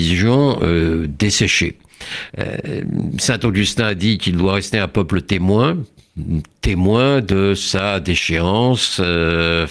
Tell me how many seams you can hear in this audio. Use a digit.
1